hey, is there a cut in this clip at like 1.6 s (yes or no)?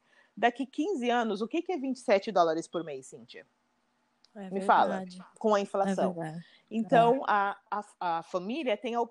no